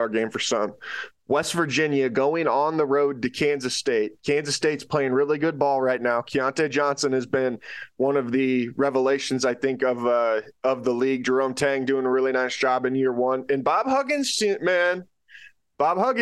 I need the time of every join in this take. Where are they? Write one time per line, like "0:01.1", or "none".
none

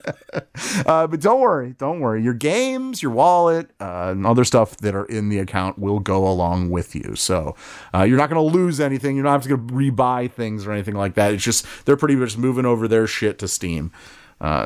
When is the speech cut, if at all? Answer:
none

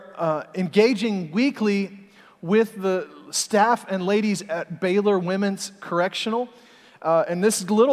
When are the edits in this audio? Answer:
none

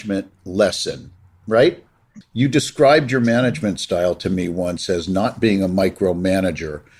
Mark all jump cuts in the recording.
0:02.2

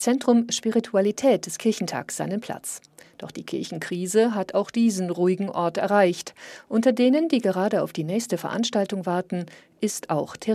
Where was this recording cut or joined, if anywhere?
none

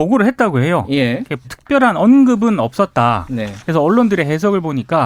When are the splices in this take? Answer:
0:01.4

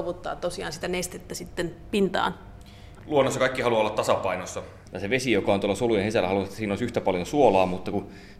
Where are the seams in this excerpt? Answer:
none

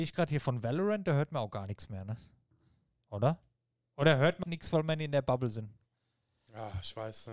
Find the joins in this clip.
0:04.4

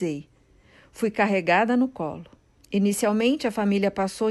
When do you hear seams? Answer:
0:02.6

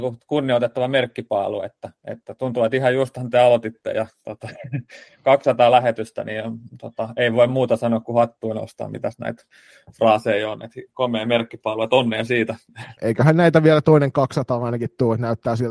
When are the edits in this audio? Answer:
0:13.0

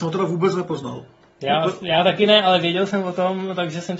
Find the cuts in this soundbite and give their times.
none

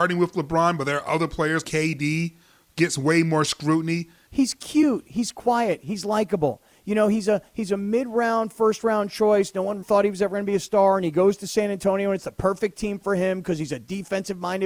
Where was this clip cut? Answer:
0:01.6
0:04.3
0:09.8

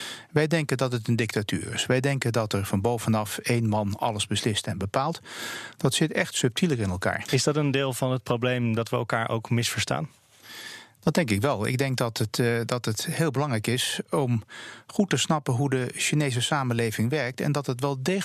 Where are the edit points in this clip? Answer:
0:07.3

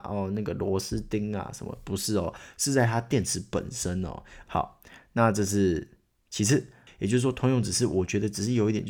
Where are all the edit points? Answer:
0:04.4
0:06.9

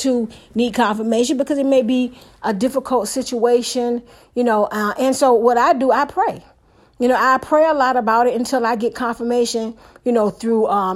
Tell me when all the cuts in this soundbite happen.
none

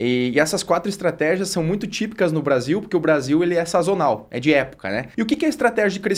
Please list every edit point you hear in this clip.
0:05.1

